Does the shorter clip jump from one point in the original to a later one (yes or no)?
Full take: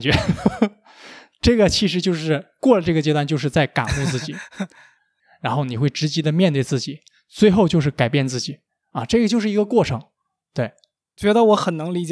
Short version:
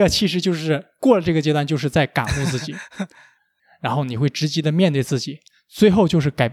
no